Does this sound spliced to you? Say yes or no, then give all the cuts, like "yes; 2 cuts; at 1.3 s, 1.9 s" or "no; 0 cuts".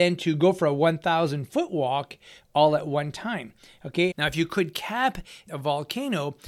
yes; 2 cuts; at 4.1 s, 5.5 s